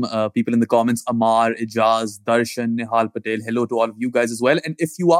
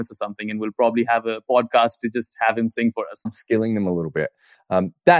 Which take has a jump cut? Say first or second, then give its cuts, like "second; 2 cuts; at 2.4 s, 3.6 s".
second; 1 cut; at 3.3 s